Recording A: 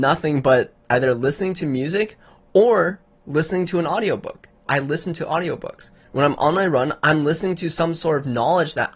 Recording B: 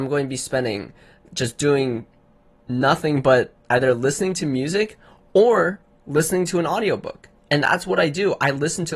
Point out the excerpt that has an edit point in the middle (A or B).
A